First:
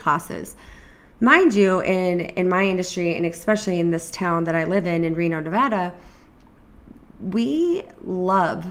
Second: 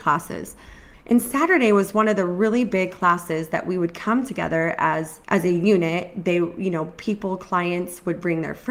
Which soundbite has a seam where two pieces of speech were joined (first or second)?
second